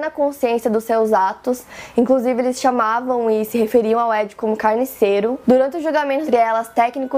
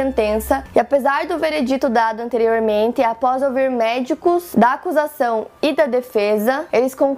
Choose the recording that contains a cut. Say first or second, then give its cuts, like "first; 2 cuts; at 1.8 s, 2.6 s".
first; 1 cut; at 6.3 s